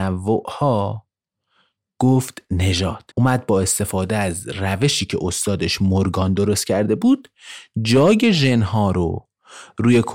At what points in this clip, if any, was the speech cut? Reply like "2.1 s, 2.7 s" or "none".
3.1 s